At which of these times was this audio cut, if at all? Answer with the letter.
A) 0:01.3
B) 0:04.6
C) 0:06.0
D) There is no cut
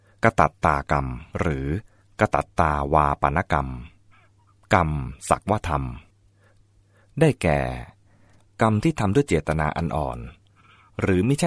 A